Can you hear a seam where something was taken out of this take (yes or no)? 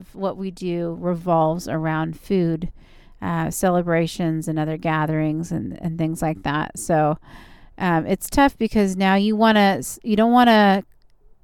no